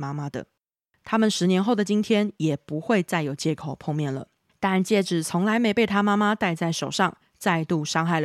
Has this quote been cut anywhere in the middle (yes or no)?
yes